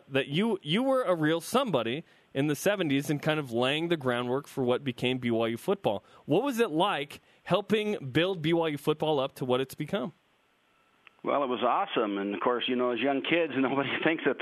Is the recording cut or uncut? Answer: uncut